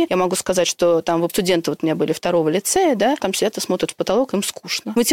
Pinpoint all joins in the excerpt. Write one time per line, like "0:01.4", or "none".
0:03.2